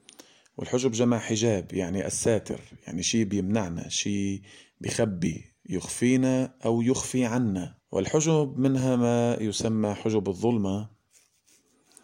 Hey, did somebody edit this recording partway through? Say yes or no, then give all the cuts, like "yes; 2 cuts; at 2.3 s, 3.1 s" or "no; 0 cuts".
yes; 2 cuts; at 5.6 s, 7.8 s